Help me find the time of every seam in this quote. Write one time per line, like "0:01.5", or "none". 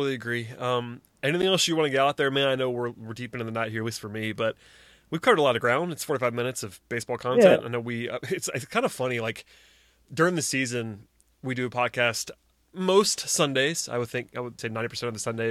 0:14.6